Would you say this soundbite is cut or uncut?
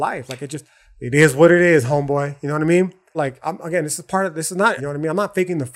cut